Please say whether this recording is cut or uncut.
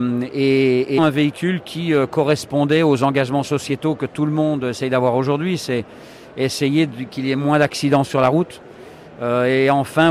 cut